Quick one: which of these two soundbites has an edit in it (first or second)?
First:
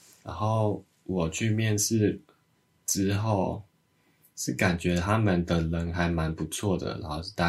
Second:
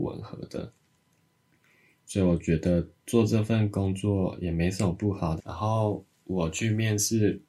second